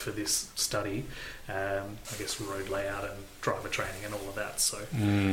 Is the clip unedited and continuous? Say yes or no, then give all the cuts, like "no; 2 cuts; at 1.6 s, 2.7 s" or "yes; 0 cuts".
no; 1 cut; at 2.0 s